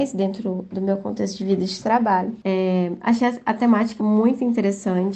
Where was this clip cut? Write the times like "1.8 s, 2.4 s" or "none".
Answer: 2.4 s, 4.0 s